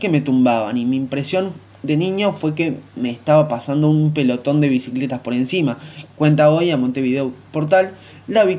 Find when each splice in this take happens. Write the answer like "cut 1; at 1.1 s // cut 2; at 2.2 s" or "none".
cut 1; at 6.1 s